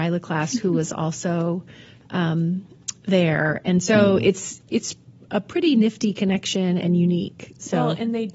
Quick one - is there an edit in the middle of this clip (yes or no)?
no